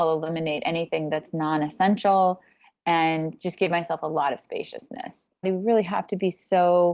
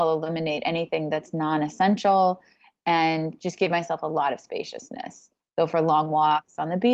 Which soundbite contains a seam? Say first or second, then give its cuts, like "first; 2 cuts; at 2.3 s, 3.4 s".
first; 1 cut; at 5.4 s